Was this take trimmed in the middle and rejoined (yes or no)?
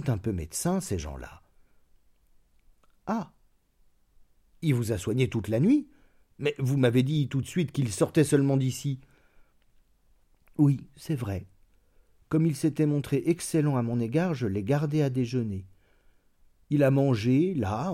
no